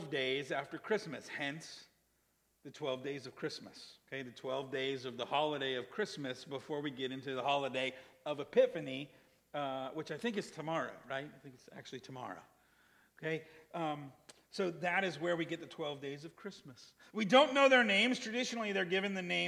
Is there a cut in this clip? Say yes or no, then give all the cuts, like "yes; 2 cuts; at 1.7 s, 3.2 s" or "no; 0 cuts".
no; 0 cuts